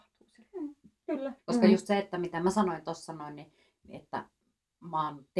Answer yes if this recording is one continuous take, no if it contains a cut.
no